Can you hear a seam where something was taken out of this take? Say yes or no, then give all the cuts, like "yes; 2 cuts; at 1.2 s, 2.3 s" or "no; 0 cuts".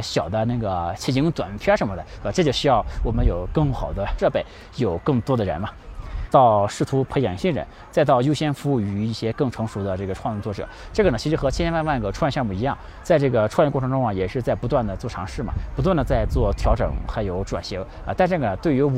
yes; 1 cut; at 6.3 s